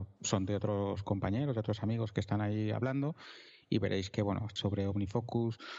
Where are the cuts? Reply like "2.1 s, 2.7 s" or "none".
4.6 s

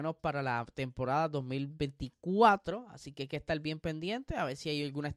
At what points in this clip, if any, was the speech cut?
none

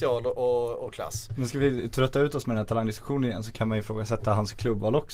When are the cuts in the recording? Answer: none

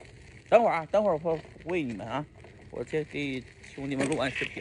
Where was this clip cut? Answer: none

